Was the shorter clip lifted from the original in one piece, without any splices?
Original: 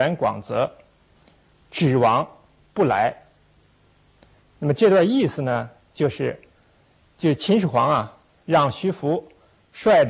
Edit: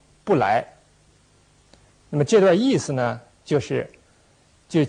yes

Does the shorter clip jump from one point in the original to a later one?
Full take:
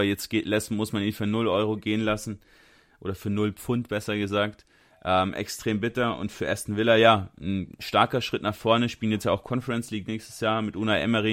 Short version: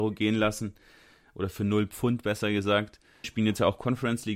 yes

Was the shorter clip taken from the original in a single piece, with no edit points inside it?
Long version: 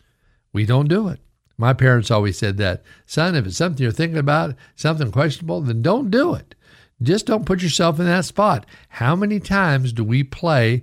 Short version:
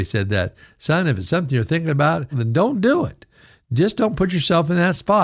no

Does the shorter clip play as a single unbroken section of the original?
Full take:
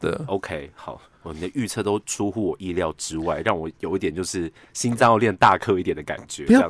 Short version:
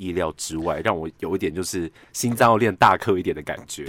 yes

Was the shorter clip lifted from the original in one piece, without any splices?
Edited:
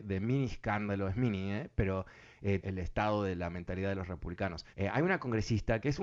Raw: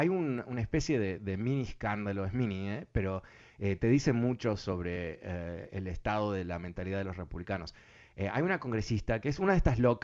no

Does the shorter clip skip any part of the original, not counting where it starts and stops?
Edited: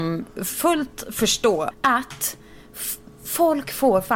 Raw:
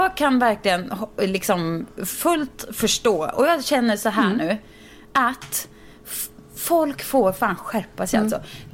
yes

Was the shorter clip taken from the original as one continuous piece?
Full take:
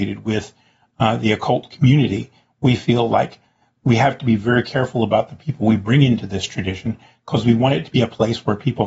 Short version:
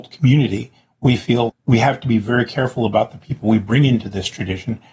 no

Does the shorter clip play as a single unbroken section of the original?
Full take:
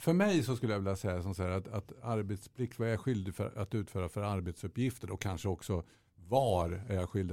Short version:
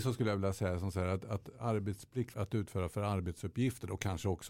no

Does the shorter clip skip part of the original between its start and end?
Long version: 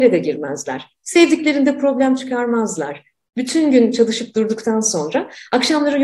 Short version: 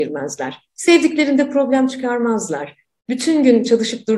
no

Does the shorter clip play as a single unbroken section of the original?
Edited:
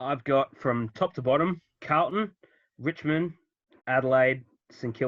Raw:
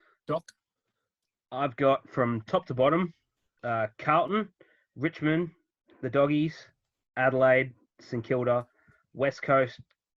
no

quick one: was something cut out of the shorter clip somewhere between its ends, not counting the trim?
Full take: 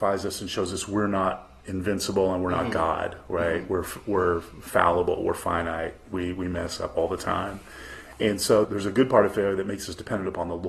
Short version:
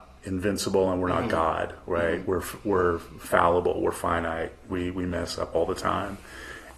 no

